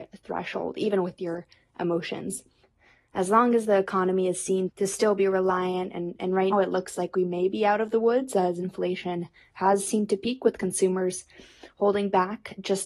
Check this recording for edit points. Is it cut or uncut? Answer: cut